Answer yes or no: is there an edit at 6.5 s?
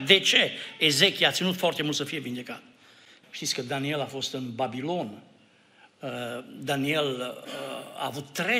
no